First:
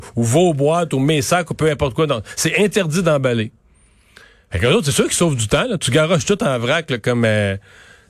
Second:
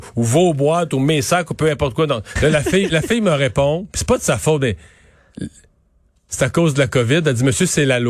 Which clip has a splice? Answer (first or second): second